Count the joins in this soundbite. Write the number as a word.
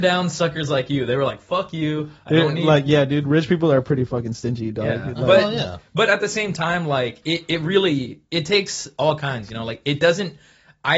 zero